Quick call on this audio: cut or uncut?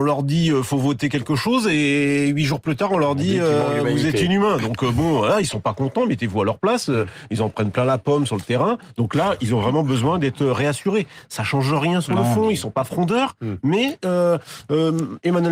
uncut